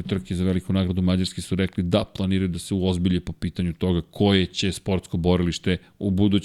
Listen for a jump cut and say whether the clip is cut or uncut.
uncut